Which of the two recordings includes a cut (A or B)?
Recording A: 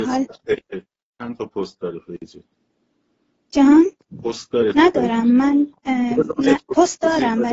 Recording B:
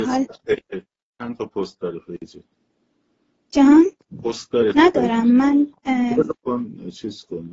B